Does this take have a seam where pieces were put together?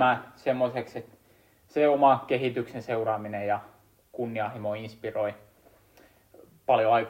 no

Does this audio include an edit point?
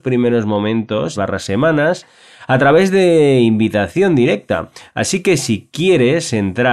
yes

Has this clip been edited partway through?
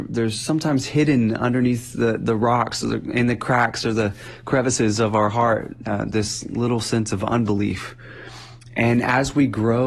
no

